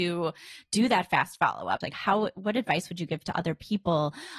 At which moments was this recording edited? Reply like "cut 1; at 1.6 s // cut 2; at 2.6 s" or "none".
cut 1; at 1.8 s